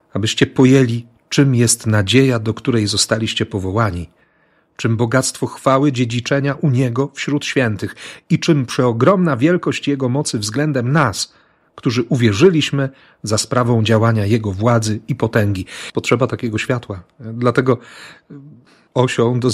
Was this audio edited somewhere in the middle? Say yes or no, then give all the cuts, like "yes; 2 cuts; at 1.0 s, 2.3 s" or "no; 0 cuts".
yes; 1 cut; at 15.9 s